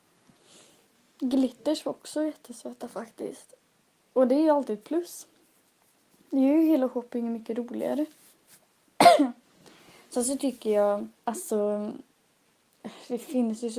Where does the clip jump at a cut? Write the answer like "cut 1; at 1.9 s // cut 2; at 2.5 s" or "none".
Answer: cut 1; at 11.2 s